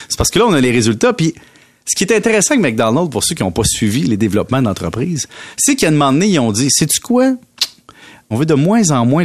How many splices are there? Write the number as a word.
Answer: one